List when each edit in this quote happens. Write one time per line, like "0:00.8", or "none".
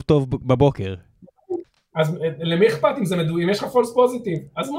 none